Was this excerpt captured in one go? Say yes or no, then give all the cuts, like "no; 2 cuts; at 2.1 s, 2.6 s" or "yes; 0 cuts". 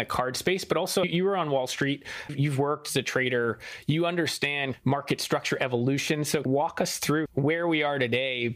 yes; 0 cuts